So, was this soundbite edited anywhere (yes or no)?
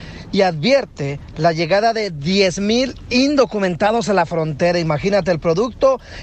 no